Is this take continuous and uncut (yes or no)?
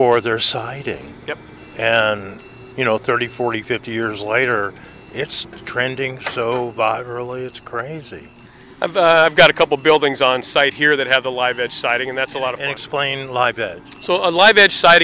yes